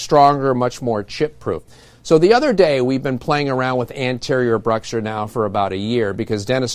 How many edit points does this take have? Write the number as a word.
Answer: zero